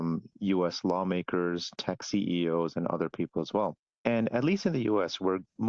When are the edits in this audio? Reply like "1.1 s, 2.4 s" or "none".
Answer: none